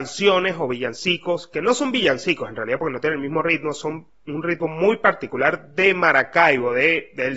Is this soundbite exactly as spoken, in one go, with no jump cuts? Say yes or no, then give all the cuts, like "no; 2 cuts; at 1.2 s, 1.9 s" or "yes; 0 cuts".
yes; 0 cuts